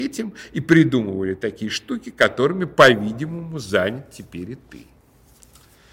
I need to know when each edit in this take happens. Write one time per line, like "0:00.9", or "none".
none